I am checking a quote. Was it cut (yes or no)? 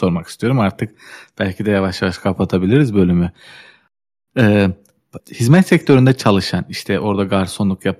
yes